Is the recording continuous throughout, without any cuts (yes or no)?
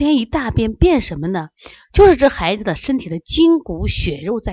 yes